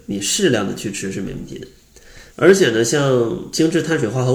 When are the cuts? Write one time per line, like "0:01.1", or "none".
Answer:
0:02.3